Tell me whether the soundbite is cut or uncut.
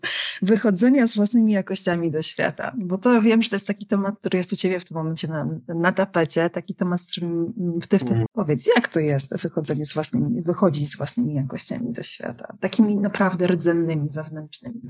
cut